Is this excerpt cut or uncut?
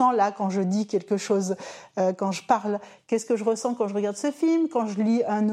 uncut